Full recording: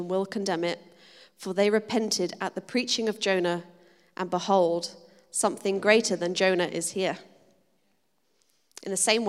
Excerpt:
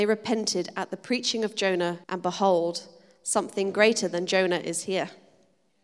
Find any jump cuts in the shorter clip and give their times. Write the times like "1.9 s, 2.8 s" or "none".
2.0 s

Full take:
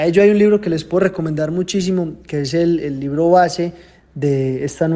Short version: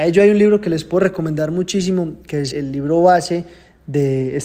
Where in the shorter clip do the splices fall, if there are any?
2.5 s

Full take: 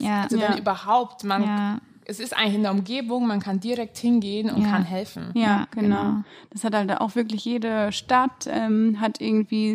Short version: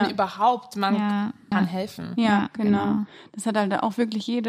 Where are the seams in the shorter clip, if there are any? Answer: 1.5 s

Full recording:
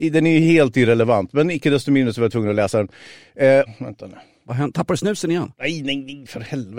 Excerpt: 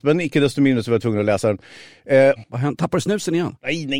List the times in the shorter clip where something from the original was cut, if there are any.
2.4 s

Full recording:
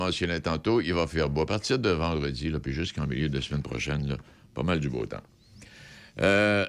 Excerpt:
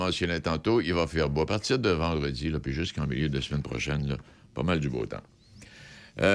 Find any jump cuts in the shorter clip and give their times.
none

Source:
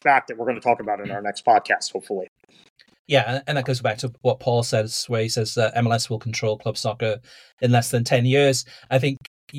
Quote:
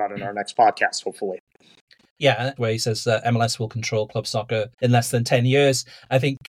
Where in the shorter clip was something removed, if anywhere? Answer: 2.6 s, 4.7 s

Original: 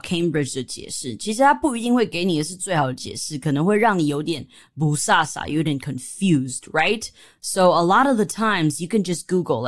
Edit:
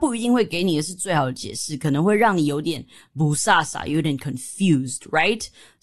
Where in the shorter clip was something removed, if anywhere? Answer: none

